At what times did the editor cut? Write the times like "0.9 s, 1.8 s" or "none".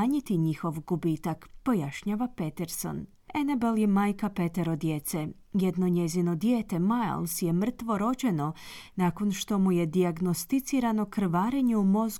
none